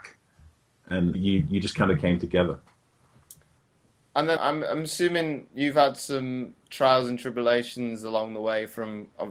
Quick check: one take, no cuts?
no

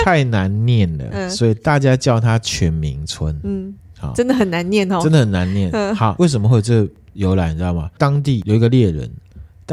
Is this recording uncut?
yes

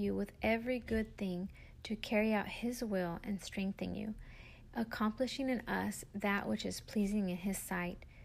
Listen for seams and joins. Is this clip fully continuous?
no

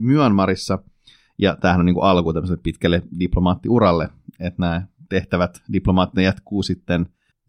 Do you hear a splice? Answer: no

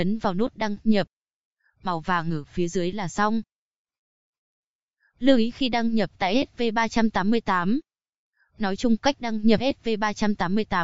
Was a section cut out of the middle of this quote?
no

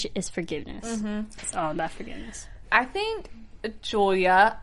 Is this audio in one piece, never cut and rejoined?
yes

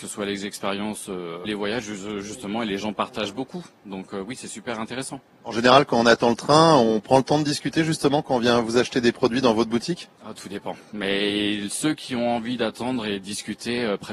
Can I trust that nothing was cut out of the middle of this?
no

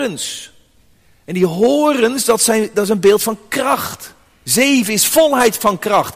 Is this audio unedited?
yes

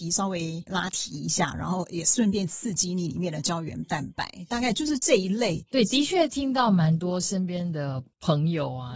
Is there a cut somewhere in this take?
no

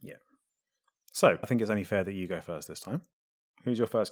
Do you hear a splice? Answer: yes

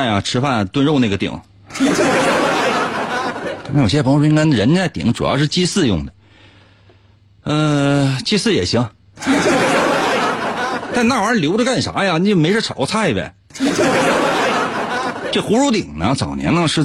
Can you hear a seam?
no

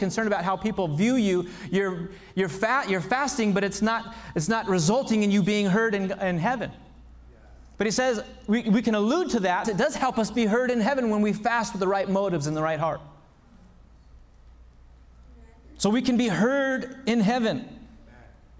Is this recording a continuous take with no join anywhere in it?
no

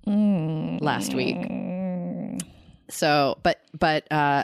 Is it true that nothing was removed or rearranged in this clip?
yes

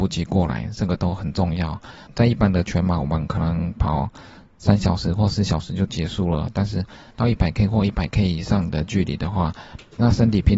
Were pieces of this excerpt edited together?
no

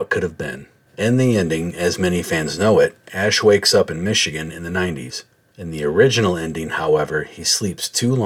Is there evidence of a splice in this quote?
no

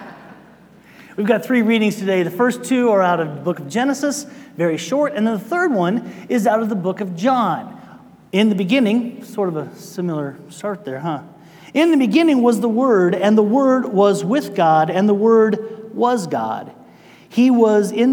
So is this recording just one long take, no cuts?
no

